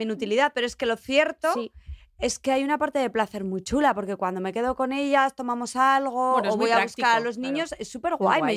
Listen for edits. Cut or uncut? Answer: uncut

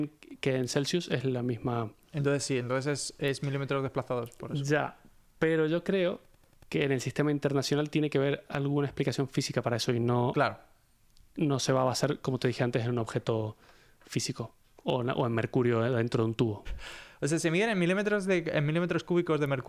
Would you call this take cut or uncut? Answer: cut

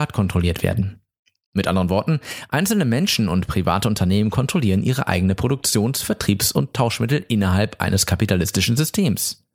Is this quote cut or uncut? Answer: uncut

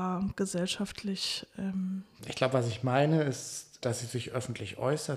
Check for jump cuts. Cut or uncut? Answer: cut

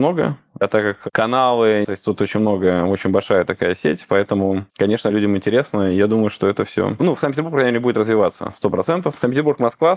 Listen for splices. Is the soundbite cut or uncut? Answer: cut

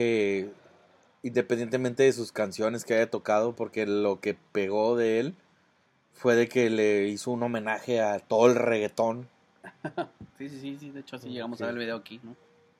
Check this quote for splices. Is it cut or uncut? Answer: uncut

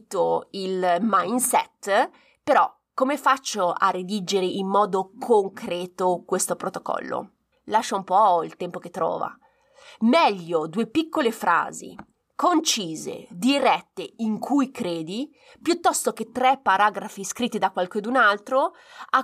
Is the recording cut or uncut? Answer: cut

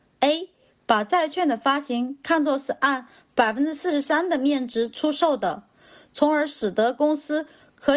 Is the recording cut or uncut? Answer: uncut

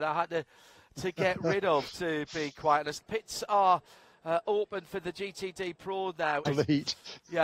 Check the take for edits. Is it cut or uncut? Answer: cut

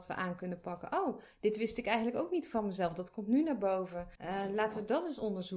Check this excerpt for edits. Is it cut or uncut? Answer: cut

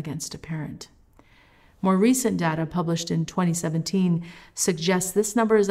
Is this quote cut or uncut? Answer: uncut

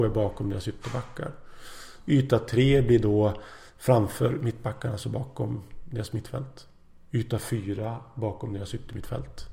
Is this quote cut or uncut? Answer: uncut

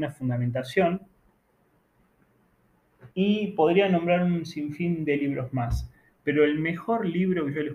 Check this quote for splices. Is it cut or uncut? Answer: cut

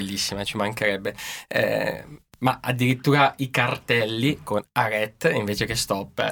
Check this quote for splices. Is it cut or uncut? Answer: uncut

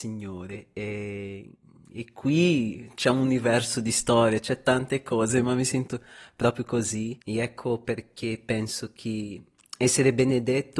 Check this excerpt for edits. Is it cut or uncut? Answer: cut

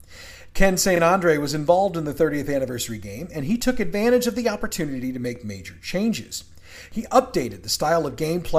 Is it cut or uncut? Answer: uncut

